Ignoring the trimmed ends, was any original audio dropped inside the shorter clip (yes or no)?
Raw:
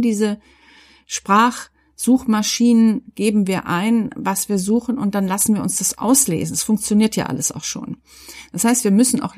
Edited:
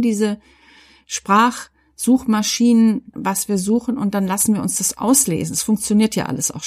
yes